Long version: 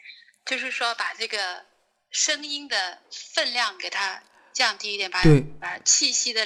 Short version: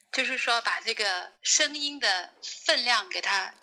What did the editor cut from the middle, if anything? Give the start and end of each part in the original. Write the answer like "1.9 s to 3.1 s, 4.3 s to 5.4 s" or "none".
1.7 s to 2.0 s